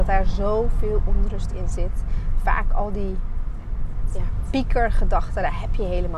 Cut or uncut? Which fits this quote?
uncut